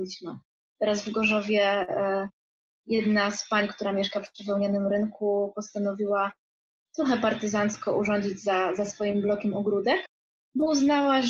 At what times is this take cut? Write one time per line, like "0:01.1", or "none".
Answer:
none